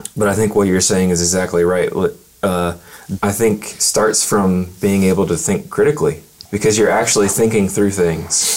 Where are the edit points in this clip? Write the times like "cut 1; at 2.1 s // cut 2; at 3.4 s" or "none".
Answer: cut 1; at 3.2 s // cut 2; at 6.5 s